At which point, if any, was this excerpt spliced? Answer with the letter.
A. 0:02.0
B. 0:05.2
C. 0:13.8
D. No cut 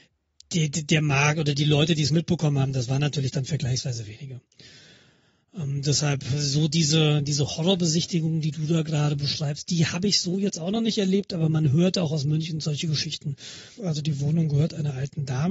C